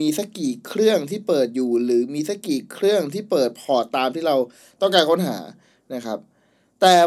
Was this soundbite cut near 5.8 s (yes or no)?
no